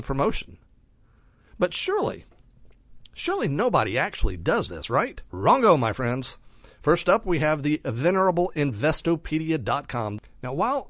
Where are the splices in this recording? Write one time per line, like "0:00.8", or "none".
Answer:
0:05.3